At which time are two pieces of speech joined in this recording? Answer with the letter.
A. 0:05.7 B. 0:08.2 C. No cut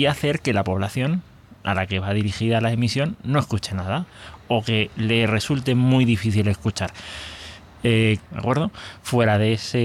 B